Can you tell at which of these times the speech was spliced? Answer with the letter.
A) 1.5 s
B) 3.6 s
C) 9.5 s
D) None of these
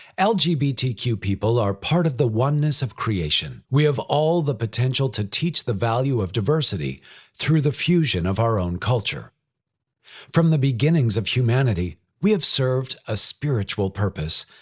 B